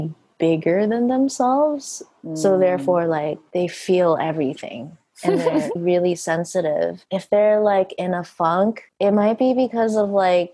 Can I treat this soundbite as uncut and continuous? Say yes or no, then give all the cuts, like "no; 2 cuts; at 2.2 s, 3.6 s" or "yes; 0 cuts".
no; 1 cut; at 5.8 s